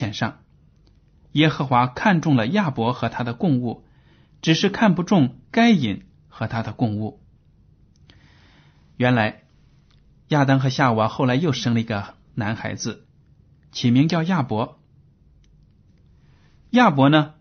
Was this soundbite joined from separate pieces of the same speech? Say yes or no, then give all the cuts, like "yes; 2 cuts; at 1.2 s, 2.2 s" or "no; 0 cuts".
no; 0 cuts